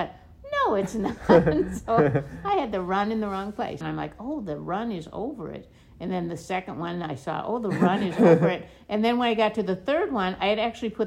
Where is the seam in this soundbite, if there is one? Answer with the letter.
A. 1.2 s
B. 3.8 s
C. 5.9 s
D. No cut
B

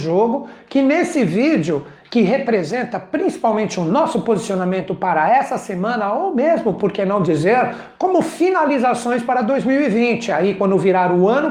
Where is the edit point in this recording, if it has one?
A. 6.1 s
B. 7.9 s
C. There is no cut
B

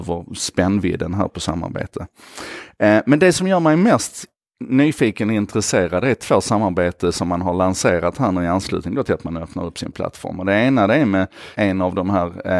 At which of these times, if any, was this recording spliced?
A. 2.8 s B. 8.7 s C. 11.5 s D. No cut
C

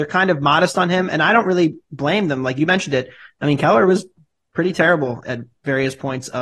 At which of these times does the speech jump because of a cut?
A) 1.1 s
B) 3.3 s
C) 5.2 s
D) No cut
C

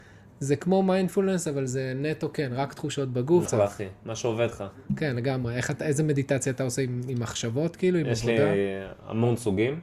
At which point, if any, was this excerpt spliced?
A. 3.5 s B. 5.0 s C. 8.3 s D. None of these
A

